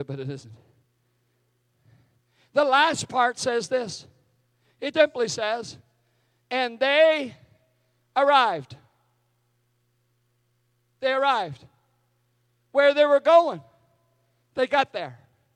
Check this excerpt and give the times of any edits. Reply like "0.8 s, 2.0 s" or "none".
4.9 s